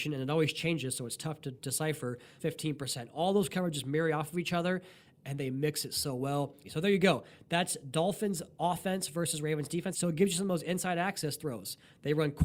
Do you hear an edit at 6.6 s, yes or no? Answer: yes